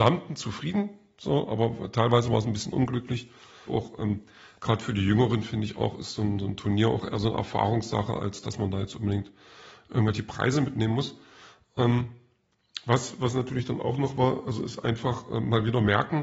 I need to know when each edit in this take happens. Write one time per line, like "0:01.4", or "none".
0:03.7